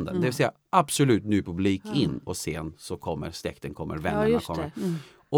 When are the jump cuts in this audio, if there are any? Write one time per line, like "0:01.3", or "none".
0:02.3